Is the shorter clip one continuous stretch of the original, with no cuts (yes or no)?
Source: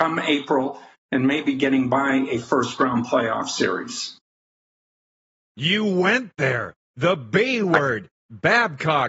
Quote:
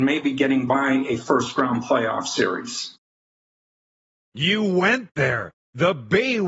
yes